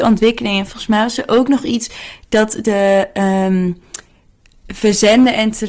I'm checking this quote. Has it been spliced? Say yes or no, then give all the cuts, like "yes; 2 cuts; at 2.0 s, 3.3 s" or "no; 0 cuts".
no; 0 cuts